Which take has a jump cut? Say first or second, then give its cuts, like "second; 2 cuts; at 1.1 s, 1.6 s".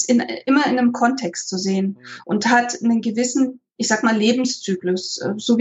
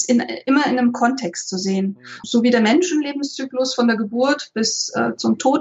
second; 1 cut; at 2.2 s